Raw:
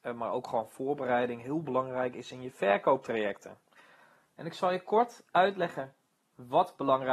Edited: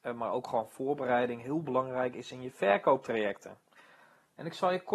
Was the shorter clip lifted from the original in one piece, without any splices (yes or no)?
yes